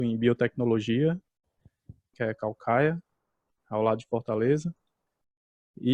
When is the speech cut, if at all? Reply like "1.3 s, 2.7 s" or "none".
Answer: 2.1 s

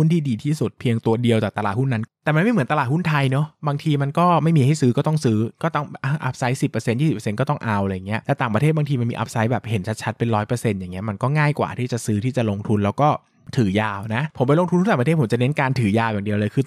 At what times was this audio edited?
2.1 s

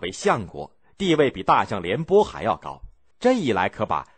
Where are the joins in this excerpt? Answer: 3.1 s

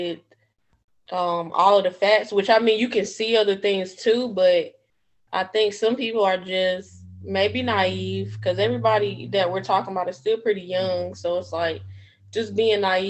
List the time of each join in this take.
none

